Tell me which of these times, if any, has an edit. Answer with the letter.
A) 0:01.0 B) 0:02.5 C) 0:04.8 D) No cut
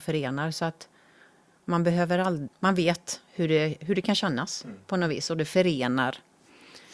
B